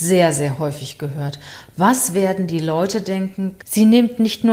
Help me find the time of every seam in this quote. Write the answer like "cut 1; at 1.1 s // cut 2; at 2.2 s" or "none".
cut 1; at 3.6 s